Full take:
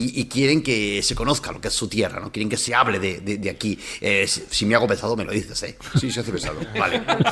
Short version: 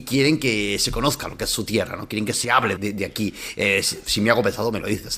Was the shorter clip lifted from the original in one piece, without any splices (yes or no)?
no